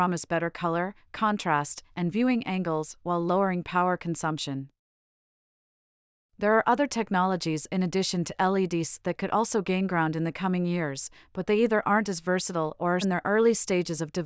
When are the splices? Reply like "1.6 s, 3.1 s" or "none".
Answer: 13.0 s